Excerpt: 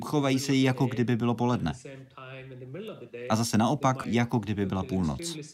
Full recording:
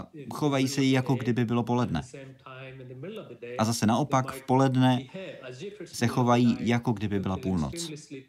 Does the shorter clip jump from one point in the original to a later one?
yes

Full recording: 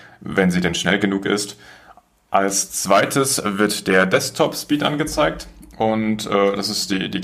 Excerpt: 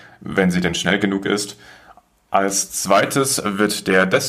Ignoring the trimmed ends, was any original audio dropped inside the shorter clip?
no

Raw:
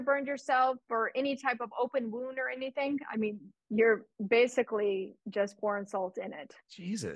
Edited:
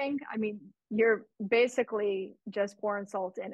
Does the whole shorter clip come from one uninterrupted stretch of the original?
yes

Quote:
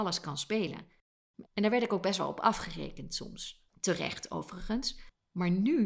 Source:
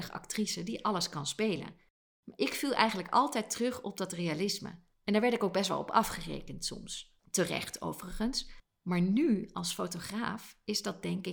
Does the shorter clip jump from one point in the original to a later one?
yes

